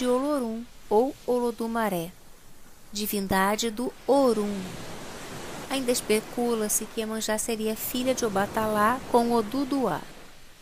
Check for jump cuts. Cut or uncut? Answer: cut